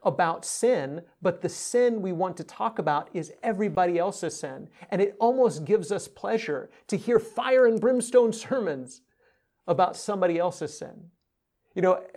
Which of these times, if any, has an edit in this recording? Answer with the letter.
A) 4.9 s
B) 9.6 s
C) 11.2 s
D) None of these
D